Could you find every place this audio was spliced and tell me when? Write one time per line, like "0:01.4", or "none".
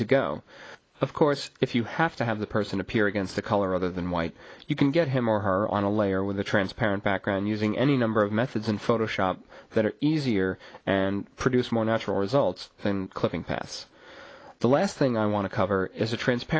none